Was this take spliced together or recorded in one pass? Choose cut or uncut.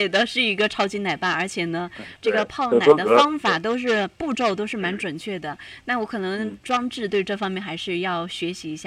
uncut